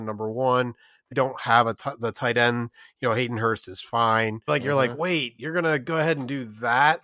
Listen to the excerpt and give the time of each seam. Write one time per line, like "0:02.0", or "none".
0:01.1
0:04.5